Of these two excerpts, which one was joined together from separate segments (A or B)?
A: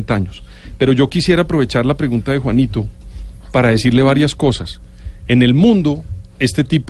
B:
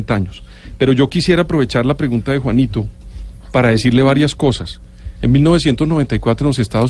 B